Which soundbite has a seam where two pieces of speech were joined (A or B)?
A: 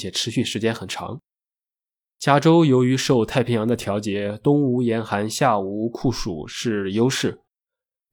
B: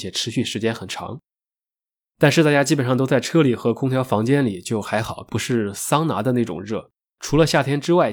B